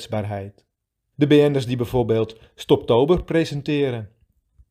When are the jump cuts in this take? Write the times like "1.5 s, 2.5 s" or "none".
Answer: 1.1 s